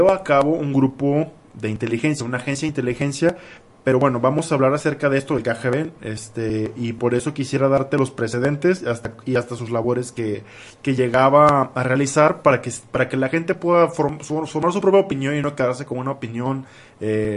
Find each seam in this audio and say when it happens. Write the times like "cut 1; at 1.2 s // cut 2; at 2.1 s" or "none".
none